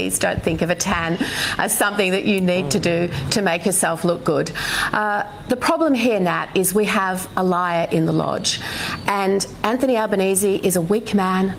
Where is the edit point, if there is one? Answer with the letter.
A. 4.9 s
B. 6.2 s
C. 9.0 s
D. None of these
D